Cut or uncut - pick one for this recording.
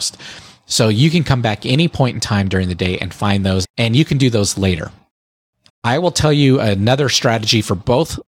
cut